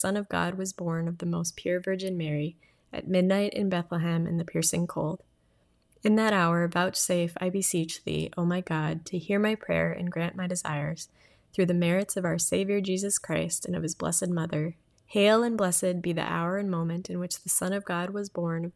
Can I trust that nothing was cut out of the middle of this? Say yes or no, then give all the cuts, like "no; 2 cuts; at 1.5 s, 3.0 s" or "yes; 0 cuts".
no; 1 cut; at 14.9 s